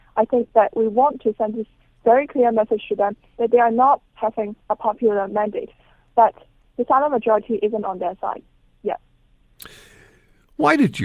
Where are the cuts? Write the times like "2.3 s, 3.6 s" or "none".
none